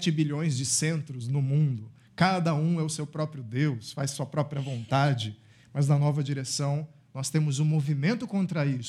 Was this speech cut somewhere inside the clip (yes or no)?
no